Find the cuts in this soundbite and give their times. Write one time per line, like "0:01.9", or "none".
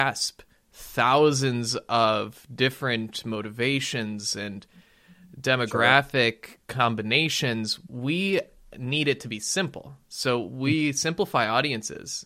none